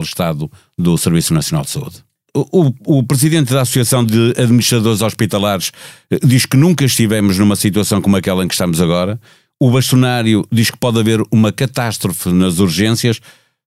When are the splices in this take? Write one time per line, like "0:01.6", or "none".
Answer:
0:02.3